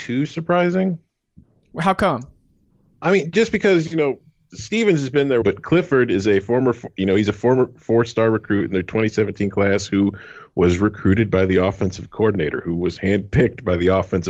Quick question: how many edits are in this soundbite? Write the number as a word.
one